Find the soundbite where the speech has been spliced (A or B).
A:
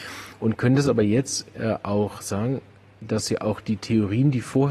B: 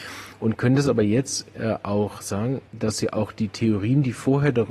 B